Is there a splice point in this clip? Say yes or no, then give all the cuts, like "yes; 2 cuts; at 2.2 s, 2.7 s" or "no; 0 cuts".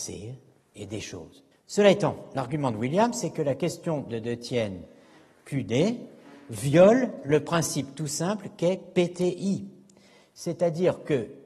yes; 1 cut; at 1.5 s